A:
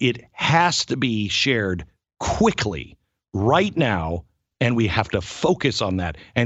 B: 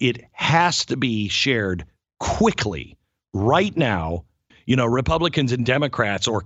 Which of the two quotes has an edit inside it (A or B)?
B